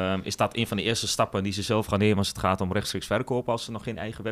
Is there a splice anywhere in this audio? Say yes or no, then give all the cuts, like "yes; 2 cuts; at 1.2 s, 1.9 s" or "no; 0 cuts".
no; 0 cuts